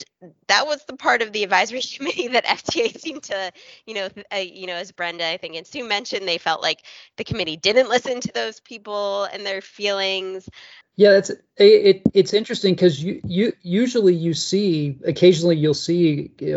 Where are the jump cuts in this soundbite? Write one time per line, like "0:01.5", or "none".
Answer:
0:10.8